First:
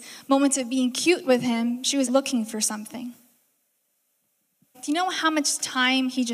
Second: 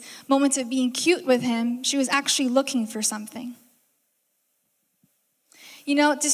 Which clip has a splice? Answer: first; 2 cuts; at 2.1 s, 4.7 s

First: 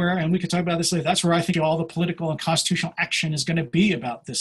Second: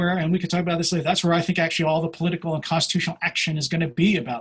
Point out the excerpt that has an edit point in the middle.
first; 1 cut; at 1.5 s

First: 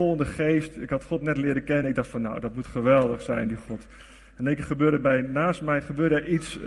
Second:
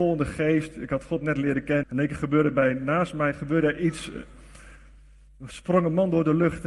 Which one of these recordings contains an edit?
second; 1 cut; at 1.8 s

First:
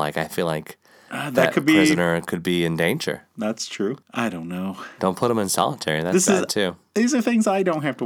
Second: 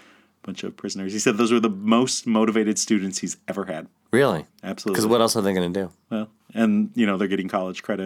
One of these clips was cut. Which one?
first; 1 cut; at 4.0 s

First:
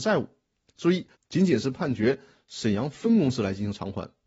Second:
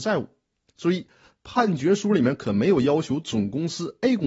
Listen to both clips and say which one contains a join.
first; 1 cut; at 1.1 s

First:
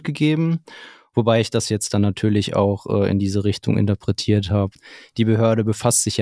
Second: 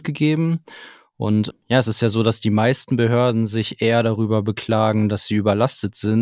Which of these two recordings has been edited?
first; 1 cut; at 1.1 s

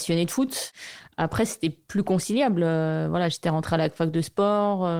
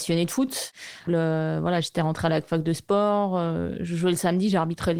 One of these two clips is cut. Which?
second; 1 cut; at 1.1 s

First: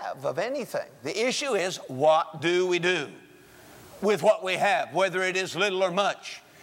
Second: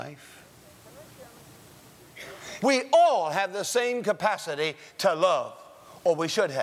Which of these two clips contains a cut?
second; 1 cut; at 2.6 s

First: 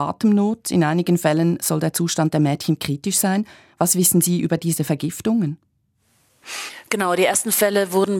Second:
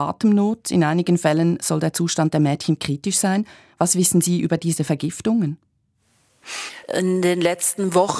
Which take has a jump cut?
second; 1 cut; at 6.8 s

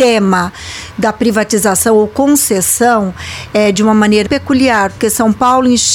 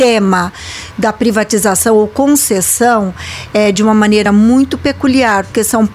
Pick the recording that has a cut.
first; 1 cut; at 4.3 s

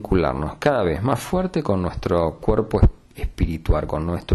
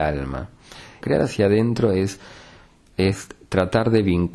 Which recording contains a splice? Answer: second; 1 cut; at 1.0 s

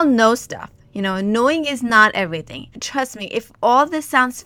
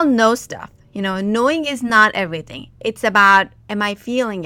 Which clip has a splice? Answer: first; 1 cut; at 2.7 s

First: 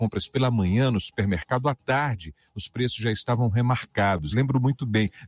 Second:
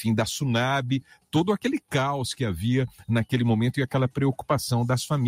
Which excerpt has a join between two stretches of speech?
first; 1 cut; at 4.3 s

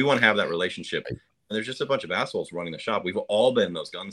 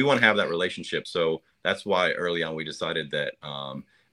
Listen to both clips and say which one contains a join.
first; 1 cut; at 1.0 s

